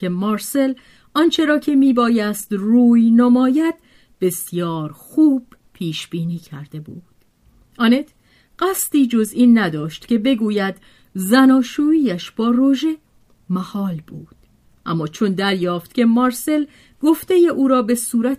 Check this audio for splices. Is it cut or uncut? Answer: uncut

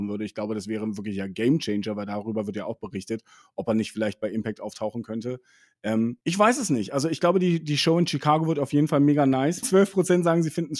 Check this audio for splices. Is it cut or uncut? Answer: cut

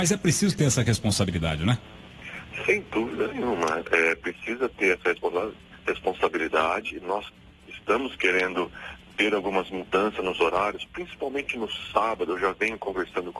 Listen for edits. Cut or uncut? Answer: uncut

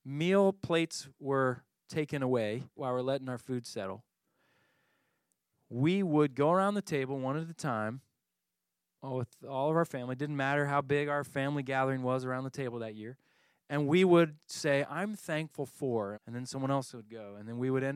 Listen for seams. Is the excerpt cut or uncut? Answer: cut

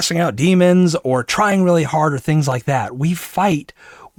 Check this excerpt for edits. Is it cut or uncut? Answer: cut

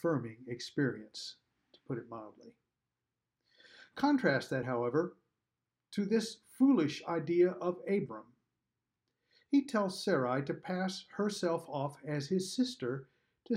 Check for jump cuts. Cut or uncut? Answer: uncut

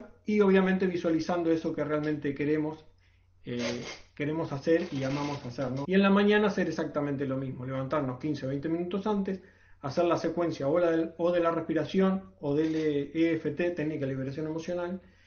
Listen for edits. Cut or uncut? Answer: cut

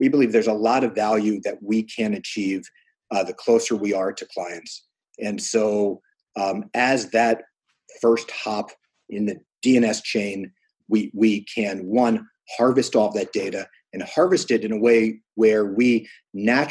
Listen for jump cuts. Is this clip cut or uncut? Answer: cut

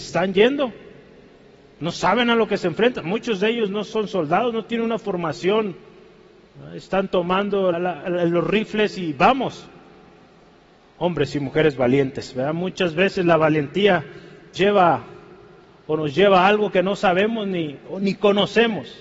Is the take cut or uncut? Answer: cut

